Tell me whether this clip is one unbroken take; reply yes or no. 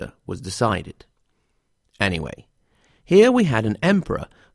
yes